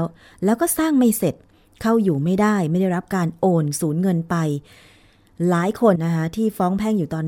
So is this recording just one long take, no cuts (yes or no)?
no